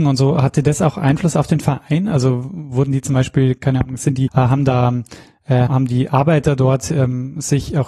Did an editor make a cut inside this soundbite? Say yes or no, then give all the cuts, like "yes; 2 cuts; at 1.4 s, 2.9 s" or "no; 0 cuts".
yes; 2 cuts; at 4.3 s, 5.7 s